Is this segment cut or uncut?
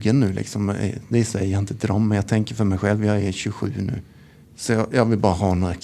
cut